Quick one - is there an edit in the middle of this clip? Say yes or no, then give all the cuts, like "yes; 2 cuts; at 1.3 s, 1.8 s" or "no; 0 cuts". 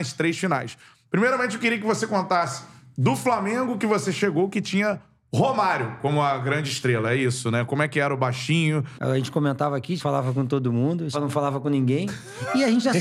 yes; 3 cuts; at 8.9 s, 10.0 s, 11.1 s